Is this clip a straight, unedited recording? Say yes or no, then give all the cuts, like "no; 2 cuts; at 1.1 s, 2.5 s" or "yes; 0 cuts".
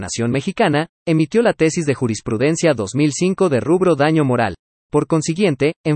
no; 1 cut; at 4.7 s